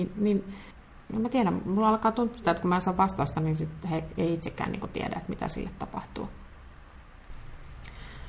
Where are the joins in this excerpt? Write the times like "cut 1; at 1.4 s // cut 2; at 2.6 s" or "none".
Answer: cut 1; at 2.4 s